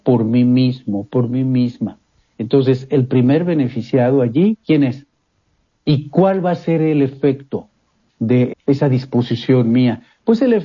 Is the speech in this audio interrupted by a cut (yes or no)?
yes